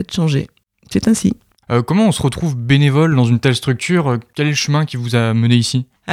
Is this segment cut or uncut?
cut